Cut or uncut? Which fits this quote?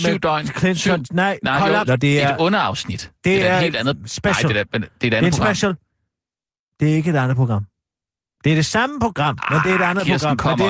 cut